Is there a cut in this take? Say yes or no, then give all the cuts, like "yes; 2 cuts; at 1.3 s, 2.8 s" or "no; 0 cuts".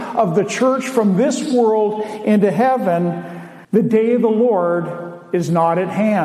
yes; 1 cut; at 3.6 s